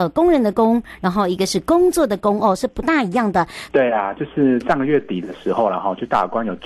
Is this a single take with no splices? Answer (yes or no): no